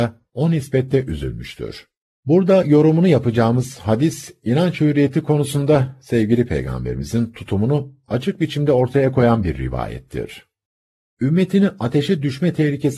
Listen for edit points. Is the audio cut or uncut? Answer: cut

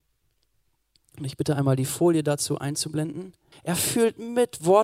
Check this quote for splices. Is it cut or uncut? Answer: cut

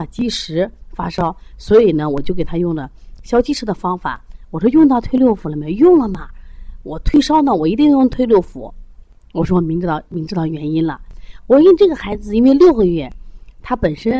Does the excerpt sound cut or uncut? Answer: uncut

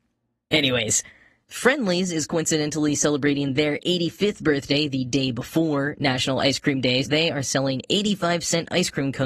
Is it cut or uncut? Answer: cut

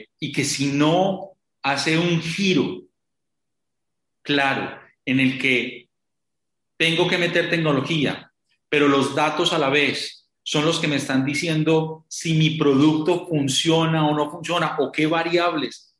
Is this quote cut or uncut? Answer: uncut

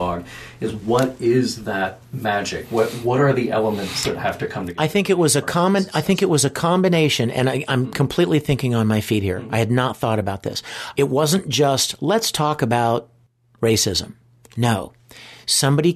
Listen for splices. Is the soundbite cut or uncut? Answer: cut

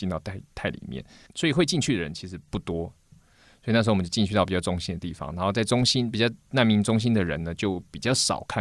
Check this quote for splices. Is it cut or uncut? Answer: uncut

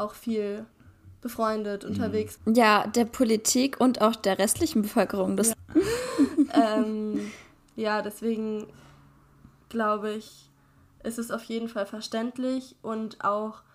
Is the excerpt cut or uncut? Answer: cut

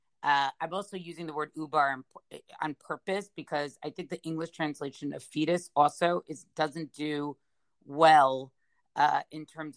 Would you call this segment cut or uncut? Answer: uncut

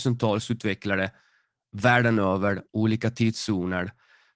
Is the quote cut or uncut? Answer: uncut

